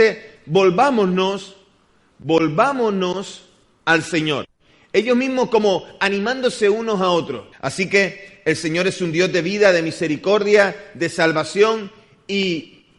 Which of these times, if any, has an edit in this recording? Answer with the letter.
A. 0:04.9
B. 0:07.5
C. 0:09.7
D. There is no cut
B